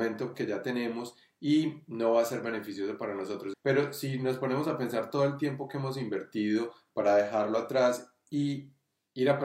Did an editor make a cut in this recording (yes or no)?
yes